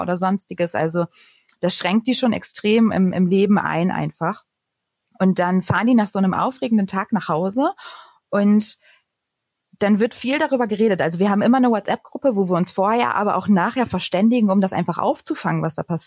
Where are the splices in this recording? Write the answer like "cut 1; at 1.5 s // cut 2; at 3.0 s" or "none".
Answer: none